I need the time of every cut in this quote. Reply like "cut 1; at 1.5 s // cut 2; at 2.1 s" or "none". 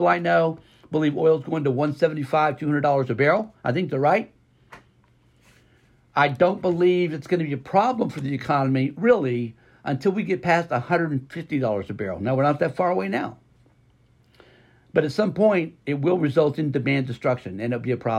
none

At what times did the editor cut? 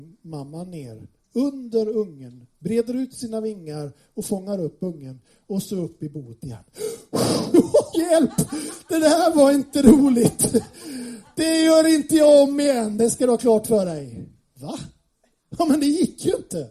cut 1; at 7.9 s // cut 2; at 14.4 s

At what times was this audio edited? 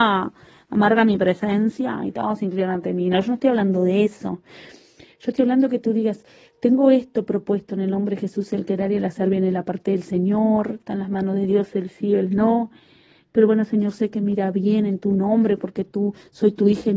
none

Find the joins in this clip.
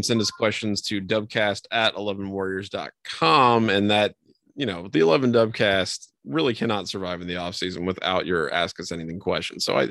none

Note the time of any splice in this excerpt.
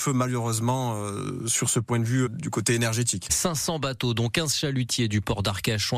cut 1; at 2.3 s // cut 2; at 3.3 s

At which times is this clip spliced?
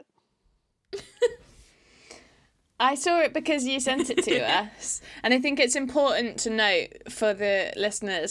none

